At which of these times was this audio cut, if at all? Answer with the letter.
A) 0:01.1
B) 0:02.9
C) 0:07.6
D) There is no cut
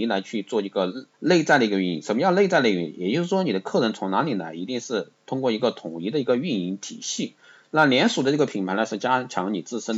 A